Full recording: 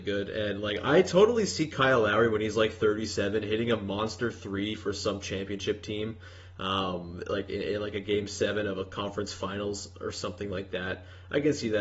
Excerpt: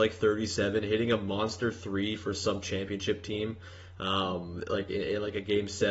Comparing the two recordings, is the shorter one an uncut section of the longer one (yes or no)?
yes